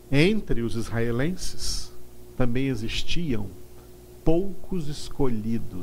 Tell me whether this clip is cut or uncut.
cut